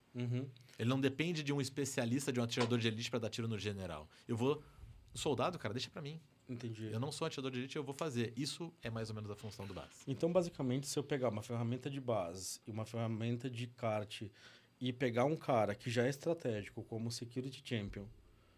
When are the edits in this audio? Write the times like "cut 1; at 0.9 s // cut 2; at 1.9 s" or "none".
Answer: none